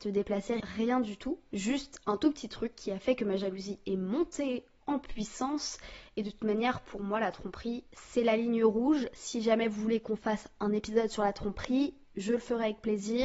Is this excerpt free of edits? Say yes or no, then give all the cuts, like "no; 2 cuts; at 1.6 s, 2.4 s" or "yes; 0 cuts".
yes; 0 cuts